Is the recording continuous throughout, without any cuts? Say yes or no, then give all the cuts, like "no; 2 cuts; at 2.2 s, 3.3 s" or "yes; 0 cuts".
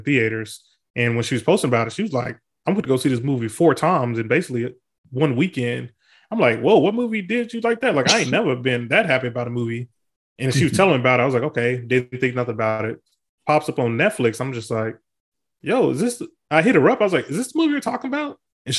yes; 0 cuts